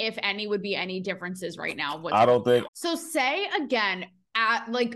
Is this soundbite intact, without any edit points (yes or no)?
no